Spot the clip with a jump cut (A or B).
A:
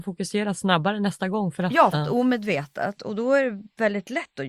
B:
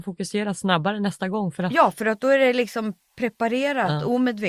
A